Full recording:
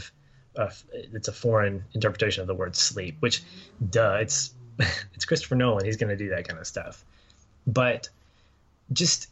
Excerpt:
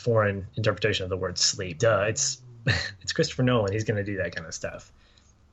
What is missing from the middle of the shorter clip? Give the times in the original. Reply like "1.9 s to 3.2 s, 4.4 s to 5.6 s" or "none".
3.2 s to 3.9 s

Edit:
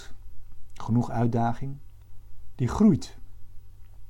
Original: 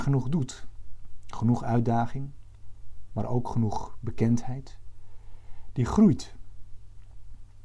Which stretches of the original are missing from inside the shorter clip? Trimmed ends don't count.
3.1 s to 5.7 s

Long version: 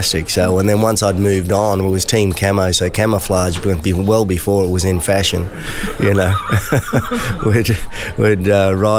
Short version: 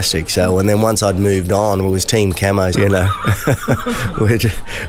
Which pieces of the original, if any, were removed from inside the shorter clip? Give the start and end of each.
2.7 s to 6.0 s

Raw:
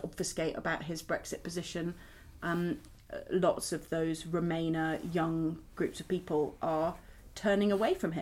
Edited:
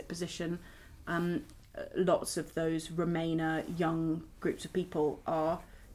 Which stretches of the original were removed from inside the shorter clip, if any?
none

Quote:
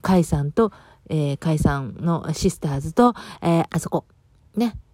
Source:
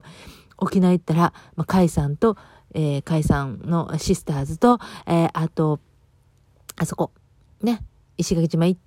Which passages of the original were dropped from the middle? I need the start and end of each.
5.3 s to 6.7 s

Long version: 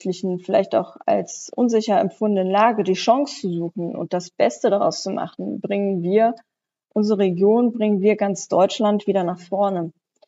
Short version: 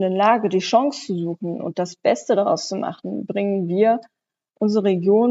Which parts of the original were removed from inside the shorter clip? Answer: none

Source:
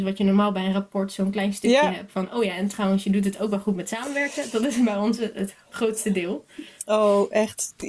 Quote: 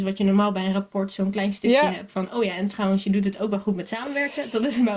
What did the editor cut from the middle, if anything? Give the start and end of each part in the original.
none

